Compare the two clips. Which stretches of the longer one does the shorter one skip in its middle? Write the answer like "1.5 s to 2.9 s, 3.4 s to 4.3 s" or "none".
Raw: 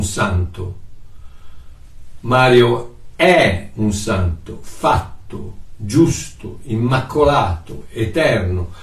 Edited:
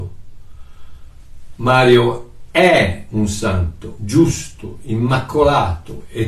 4.6 s to 5.8 s